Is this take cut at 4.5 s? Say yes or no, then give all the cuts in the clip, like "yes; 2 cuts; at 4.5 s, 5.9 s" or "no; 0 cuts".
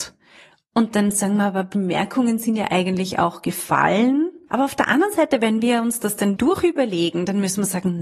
yes; 2 cuts; at 4.5 s, 6.4 s